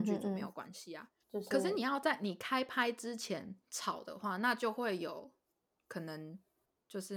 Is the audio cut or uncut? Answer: cut